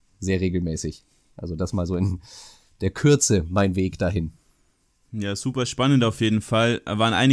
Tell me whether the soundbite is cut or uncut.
uncut